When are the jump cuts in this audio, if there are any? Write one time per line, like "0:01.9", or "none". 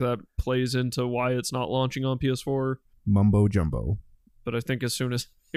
0:02.9
0:04.3